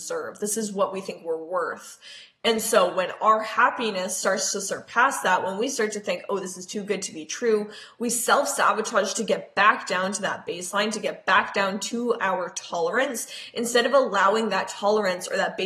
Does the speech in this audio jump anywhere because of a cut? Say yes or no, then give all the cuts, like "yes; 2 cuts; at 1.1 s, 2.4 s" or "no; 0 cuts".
no; 0 cuts